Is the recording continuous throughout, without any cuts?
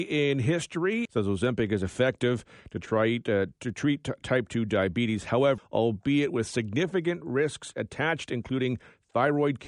no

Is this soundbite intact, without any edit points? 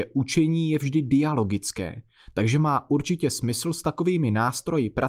yes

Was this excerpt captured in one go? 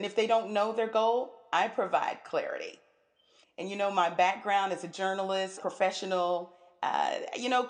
no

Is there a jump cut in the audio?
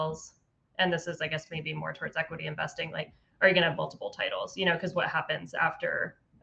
no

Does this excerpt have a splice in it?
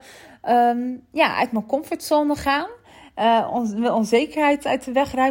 no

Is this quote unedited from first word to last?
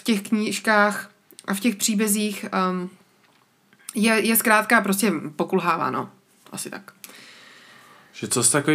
yes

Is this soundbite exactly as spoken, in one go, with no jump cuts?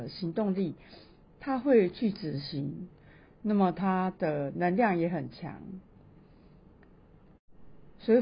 yes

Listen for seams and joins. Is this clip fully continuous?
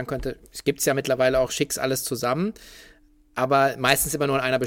yes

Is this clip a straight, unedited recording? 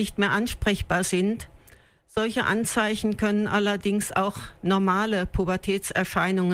yes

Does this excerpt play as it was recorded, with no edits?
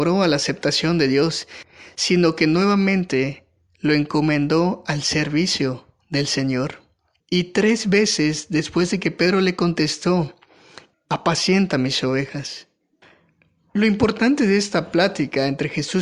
no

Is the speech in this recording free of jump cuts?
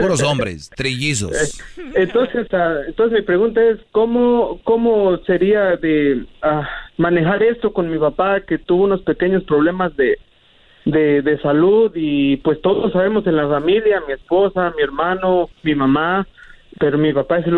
yes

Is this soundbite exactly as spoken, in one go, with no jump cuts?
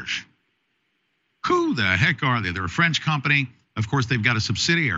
yes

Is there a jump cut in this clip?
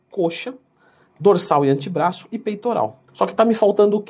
yes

